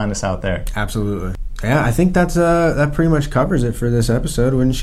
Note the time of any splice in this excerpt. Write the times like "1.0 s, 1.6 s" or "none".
none